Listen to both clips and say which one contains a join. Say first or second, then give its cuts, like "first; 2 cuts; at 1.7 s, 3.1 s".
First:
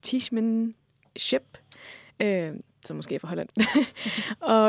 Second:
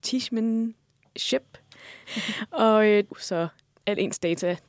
second; 2 cuts; at 2.0 s, 3.1 s